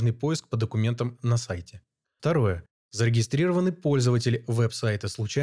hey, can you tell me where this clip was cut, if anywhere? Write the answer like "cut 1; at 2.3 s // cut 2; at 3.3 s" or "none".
none

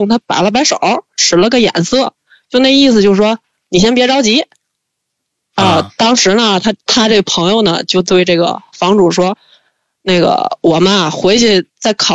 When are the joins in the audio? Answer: none

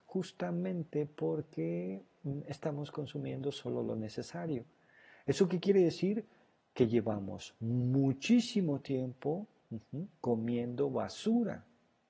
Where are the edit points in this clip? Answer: none

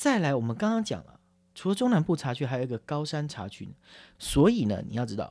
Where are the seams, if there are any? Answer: cut 1; at 4.1 s

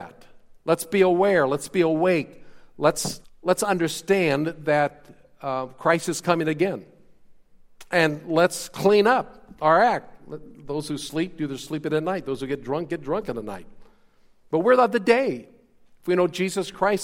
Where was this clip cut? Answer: cut 1; at 3.2 s

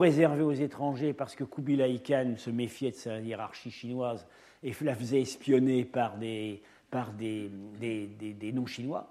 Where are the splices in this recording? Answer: none

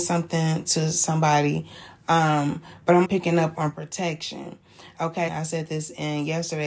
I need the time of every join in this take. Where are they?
cut 1; at 3.0 s // cut 2; at 5.3 s

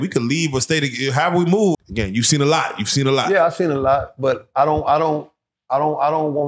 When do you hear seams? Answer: cut 1; at 1.7 s

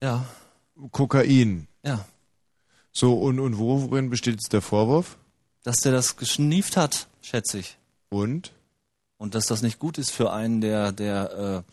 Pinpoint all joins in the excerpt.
none

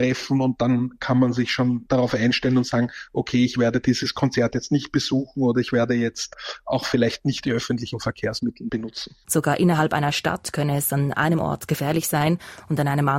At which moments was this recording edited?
cut 1; at 9.2 s

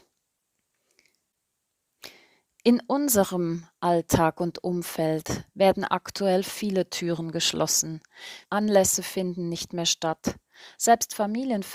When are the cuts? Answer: cut 1; at 8.4 s

